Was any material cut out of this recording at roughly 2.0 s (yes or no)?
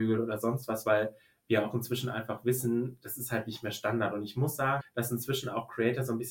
no